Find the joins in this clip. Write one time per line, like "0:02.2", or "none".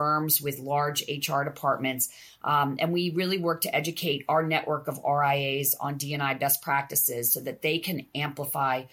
none